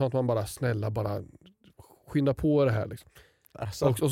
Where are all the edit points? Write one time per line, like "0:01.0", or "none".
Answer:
none

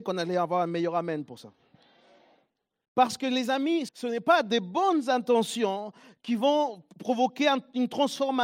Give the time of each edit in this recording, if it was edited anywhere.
0:02.8
0:03.9

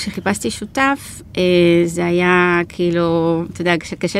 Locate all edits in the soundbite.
none

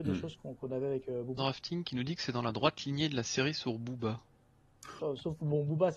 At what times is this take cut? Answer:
0:01.4
0:05.0

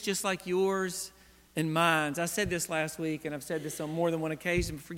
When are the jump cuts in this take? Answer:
none

